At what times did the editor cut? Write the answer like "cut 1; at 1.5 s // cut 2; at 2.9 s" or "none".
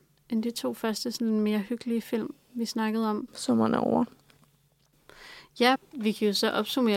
cut 1; at 3.3 s // cut 2; at 5.7 s